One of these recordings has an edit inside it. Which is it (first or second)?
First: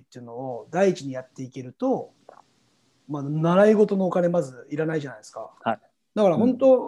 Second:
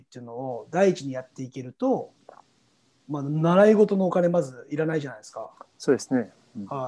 first